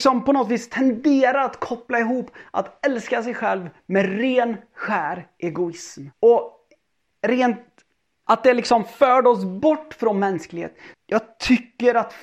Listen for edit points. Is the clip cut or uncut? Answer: cut